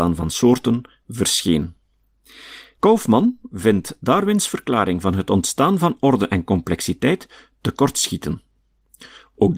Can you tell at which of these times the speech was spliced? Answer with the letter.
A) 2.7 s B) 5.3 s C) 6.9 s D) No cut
A